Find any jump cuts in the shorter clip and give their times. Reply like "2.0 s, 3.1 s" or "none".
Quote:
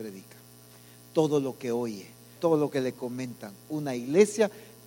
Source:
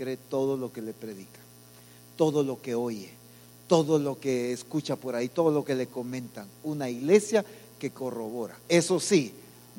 2.4 s